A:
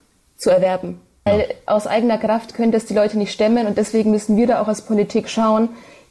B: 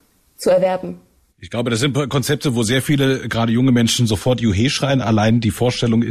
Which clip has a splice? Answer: A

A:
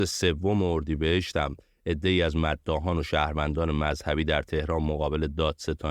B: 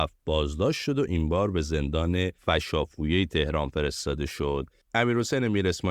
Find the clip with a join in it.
B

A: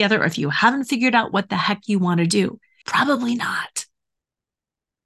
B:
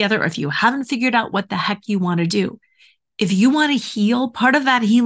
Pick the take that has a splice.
A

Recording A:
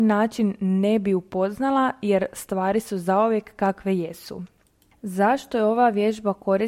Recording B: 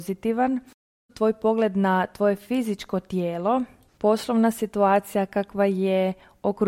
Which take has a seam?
B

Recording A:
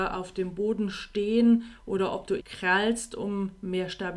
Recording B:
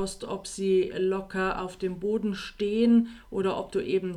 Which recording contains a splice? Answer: A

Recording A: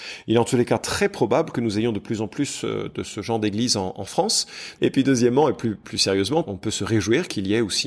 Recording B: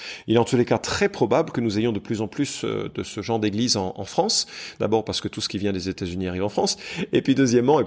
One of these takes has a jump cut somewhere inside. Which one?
A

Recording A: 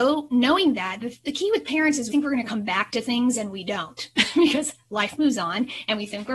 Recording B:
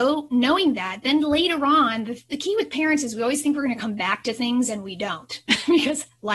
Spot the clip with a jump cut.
A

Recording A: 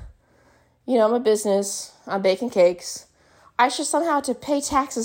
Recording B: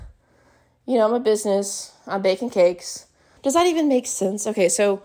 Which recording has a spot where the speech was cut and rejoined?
B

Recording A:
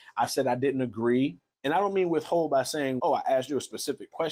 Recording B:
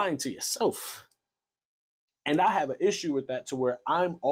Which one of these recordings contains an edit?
A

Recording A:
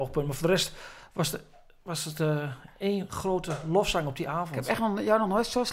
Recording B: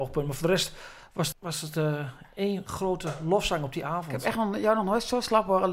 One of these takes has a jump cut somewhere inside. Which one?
B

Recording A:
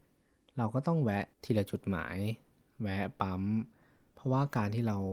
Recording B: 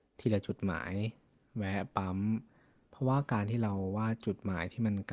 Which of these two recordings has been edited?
A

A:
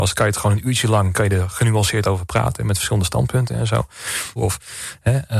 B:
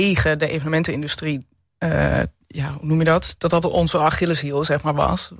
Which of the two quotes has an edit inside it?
A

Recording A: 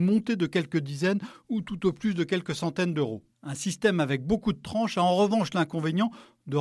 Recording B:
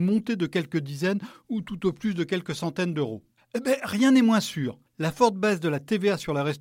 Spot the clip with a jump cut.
B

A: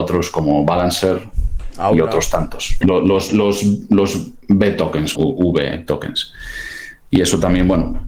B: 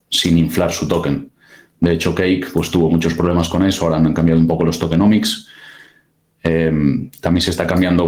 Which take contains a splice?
A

